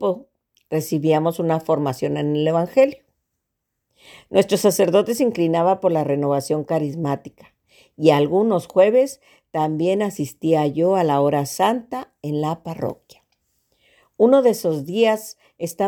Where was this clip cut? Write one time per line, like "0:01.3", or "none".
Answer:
none